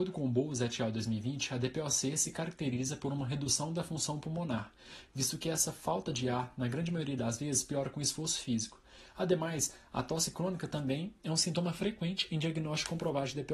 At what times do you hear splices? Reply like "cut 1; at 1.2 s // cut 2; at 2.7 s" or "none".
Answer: none